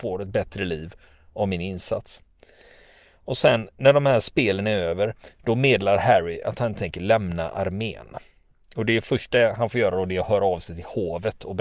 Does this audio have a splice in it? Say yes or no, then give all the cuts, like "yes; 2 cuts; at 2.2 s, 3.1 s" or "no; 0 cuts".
no; 0 cuts